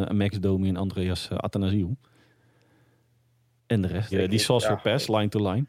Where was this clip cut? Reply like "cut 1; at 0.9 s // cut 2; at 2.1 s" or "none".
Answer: cut 1; at 4.1 s